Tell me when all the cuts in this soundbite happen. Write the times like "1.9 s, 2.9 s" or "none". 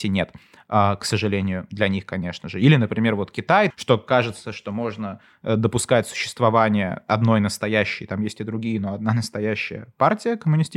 3.7 s

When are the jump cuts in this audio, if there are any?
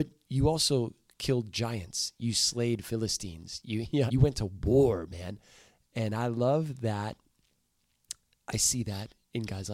4.1 s

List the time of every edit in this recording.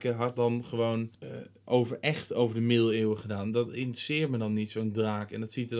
1.1 s

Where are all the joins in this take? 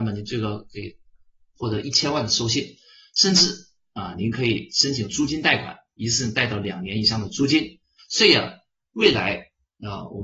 8.0 s

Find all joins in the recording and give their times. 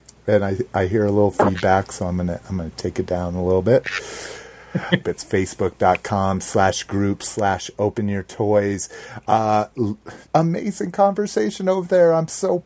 5.0 s, 10.3 s

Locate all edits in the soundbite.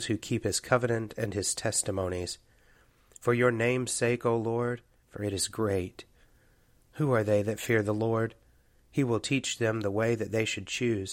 5.0 s

